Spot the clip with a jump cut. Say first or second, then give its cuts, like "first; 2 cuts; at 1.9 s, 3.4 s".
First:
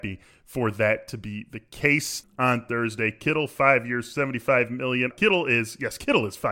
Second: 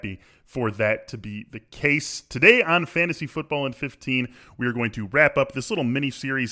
first; 2 cuts; at 2.2 s, 5.1 s